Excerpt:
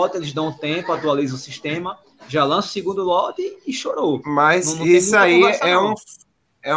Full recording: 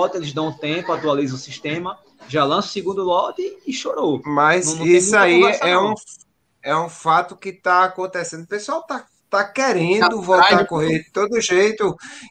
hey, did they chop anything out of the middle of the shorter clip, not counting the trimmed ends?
no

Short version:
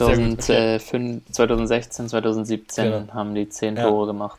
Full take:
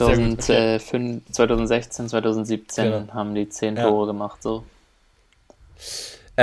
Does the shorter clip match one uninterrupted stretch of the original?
yes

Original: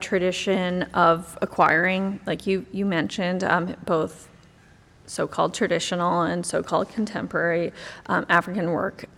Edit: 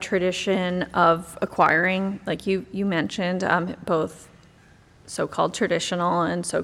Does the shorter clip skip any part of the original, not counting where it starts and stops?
no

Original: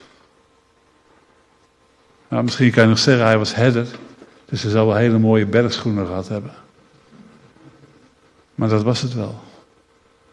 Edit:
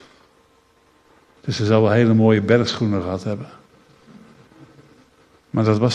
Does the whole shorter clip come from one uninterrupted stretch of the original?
no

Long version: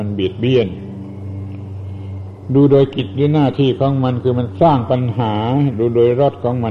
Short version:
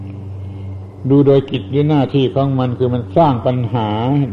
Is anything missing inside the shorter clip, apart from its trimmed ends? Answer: no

